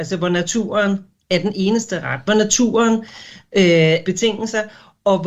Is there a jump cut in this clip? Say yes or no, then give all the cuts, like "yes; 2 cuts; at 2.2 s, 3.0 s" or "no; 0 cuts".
yes; 2 cuts; at 2.2 s, 4.0 s